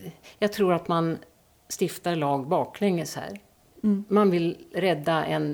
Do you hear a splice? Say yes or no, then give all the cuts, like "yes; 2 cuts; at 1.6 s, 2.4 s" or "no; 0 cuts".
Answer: no; 0 cuts